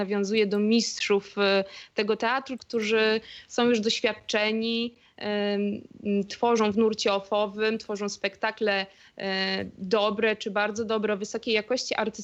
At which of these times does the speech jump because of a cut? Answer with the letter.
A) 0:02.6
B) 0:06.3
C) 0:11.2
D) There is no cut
A